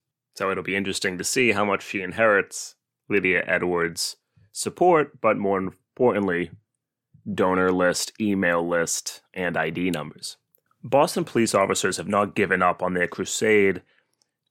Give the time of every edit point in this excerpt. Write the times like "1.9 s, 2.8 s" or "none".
10.7 s

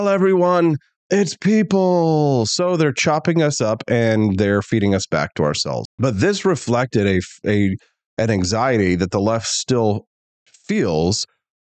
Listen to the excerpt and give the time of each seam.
5.8 s

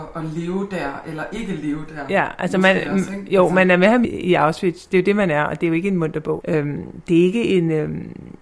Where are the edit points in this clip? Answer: 4.0 s, 6.4 s

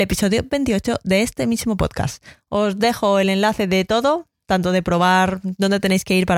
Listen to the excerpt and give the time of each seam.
none

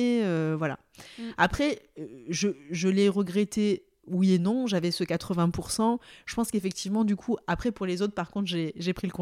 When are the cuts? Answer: none

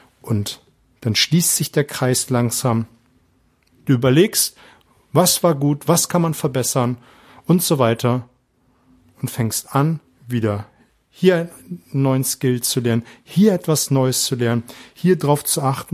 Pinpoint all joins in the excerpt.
3.7 s

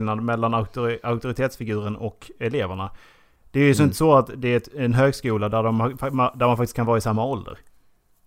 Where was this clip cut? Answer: none

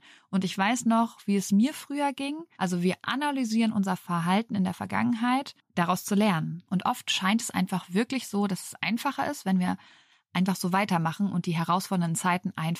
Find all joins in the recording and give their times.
2.5 s, 5.6 s, 6.7 s

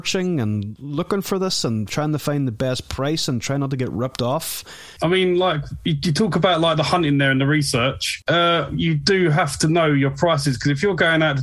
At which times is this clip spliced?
5.0 s, 8.2 s

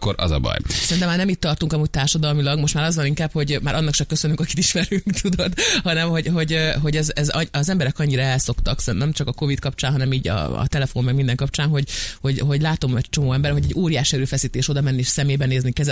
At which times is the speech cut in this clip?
none

